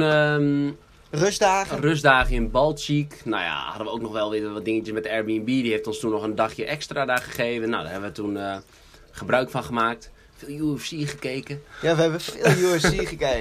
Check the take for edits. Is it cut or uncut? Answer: uncut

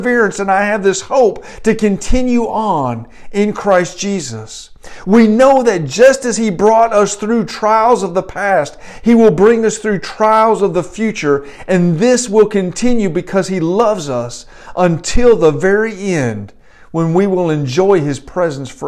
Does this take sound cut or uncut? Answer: uncut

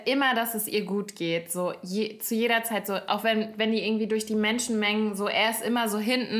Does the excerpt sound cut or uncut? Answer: uncut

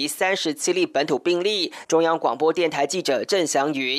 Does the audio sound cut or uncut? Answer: cut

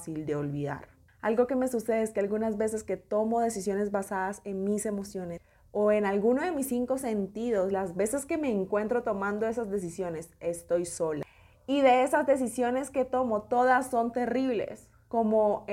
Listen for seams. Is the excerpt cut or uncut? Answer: uncut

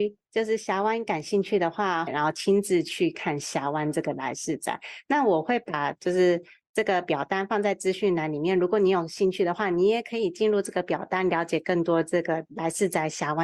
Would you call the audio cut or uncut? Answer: cut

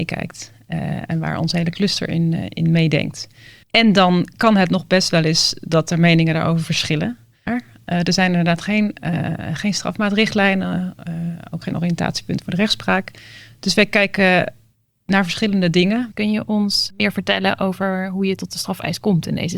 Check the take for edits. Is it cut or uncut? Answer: cut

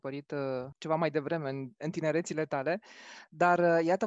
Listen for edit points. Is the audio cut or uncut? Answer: uncut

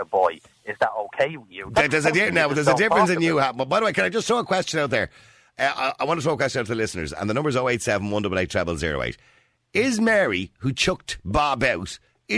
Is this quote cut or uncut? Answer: uncut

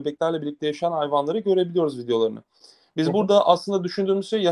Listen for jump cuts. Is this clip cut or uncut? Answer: uncut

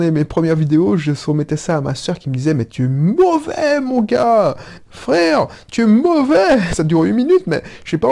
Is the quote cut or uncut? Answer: cut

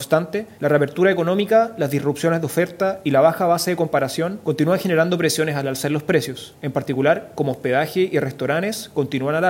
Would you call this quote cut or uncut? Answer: cut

